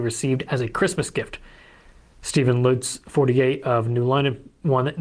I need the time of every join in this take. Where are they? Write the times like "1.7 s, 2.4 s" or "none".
none

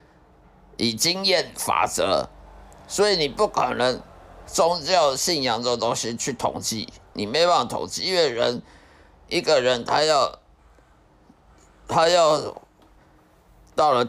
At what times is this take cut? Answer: none

